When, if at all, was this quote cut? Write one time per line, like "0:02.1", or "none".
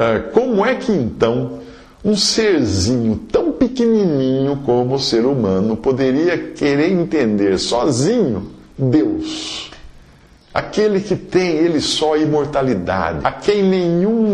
0:13.2

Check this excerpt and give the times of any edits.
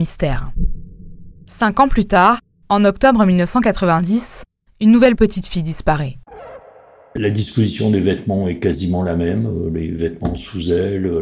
0:07.2

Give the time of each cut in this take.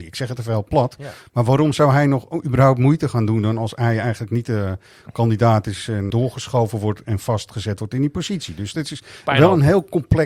0:06.1

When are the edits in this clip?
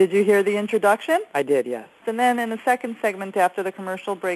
0:02.0

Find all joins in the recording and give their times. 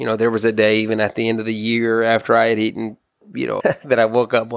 0:03.6

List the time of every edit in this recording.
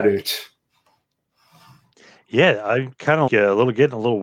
0:03.3

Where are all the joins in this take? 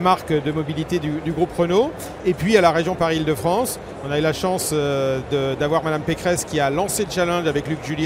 none

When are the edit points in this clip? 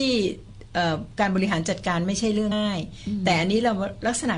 0:02.5

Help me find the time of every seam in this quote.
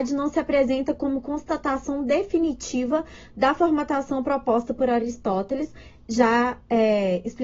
none

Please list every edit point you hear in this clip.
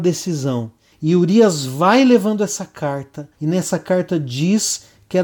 0:00.9
0:03.3

